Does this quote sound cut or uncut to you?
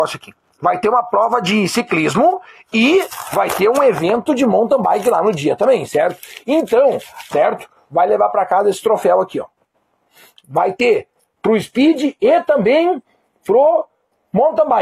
cut